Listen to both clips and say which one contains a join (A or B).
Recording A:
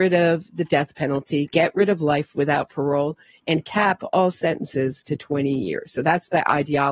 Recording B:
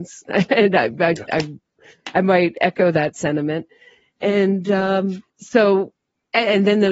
B